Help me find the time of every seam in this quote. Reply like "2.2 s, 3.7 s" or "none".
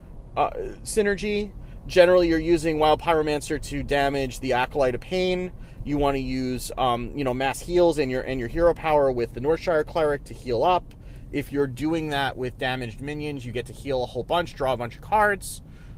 none